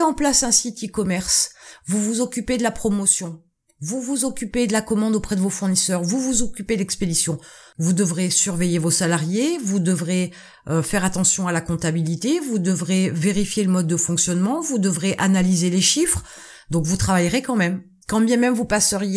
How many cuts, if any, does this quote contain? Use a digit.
2